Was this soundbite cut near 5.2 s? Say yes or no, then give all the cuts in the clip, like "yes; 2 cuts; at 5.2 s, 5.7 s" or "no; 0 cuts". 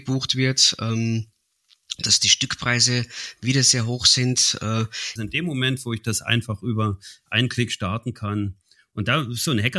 yes; 1 cut; at 5.2 s